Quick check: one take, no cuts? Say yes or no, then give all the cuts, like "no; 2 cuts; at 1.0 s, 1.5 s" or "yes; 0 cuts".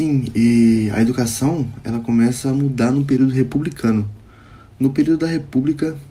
yes; 0 cuts